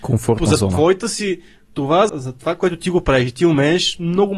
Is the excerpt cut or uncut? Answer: cut